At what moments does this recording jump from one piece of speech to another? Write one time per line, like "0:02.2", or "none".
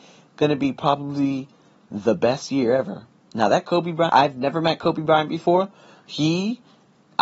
0:04.1